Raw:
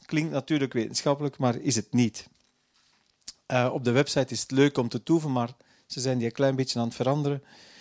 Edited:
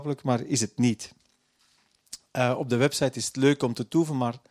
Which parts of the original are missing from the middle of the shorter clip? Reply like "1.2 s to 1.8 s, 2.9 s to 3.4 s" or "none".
none

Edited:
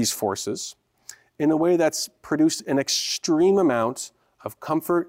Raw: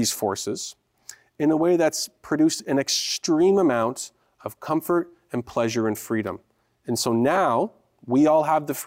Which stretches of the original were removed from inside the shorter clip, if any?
none

